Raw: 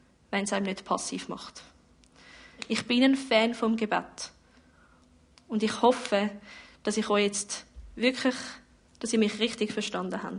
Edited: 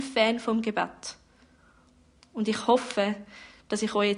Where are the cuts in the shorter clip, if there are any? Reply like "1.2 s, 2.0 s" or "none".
none